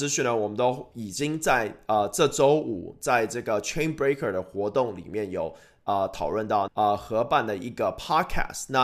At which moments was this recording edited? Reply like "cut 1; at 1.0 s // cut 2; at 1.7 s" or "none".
cut 1; at 6.7 s

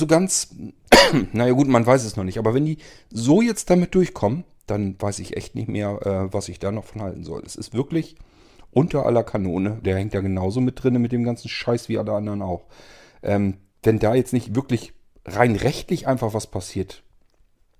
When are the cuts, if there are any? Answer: cut 1; at 9.8 s

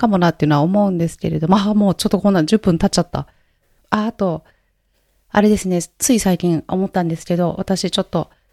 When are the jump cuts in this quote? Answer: cut 1; at 3.8 s

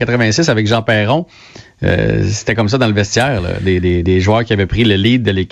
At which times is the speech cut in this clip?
none

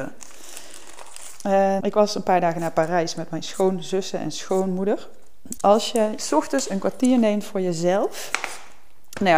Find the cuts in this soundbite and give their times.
cut 1; at 1.8 s // cut 2; at 5.6 s

